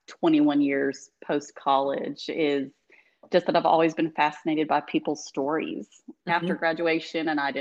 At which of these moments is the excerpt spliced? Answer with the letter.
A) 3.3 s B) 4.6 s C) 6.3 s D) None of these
C